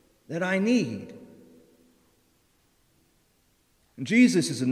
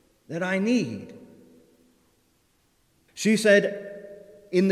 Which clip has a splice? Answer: second; 1 cut; at 3.1 s

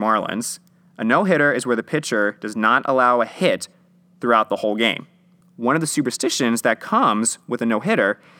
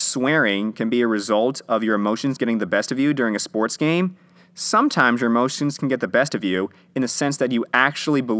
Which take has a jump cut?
first; 1 cut; at 5.4 s

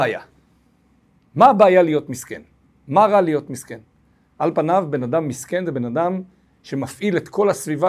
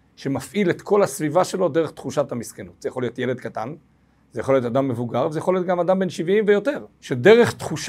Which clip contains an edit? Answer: second; 1 cut; at 6.9 s

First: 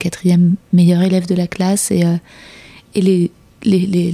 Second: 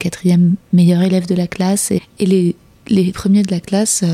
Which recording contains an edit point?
second; 2 cuts; at 2.0 s, 3.1 s

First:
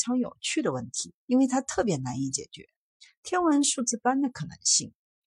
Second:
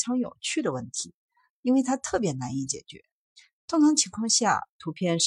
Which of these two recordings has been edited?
first; 2 cuts; at 1.2 s, 3.2 s

